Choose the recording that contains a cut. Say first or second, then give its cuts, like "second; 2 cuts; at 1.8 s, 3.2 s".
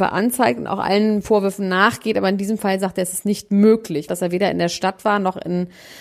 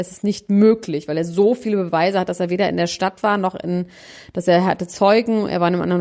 first; 1 cut; at 4.1 s